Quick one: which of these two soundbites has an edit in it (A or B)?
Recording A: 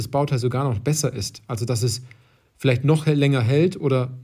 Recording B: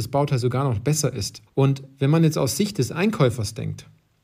B